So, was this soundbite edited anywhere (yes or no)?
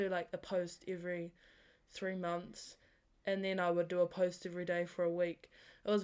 no